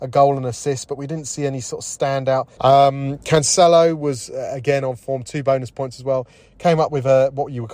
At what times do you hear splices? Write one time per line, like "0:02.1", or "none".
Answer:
0:02.6